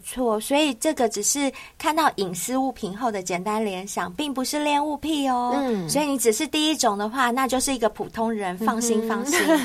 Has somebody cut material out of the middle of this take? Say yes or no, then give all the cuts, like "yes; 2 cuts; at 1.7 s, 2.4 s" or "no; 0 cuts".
no; 0 cuts